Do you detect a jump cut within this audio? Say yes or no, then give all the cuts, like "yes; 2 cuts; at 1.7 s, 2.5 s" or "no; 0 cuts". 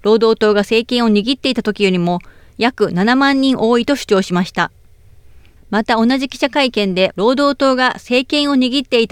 yes; 2 cuts; at 5.6 s, 7.1 s